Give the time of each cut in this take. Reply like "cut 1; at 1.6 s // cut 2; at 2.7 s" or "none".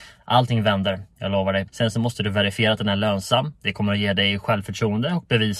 cut 1; at 1.7 s